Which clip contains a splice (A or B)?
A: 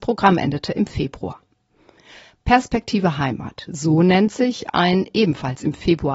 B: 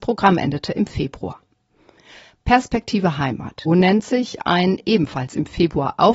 B